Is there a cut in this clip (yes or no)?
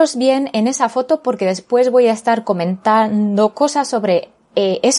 no